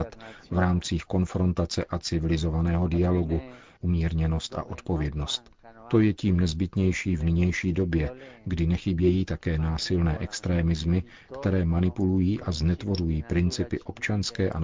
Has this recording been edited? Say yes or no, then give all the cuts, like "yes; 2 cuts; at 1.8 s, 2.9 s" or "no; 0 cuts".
yes; 1 cut; at 3.8 s